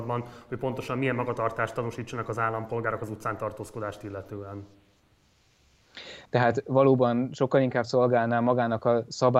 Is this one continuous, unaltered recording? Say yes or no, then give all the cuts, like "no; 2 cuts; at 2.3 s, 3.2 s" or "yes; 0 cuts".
no; 1 cut; at 6.3 s